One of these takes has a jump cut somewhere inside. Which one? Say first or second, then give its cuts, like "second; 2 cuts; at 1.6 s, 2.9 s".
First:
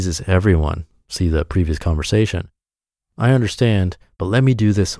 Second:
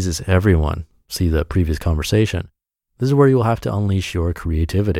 second; 1 cut; at 2.8 s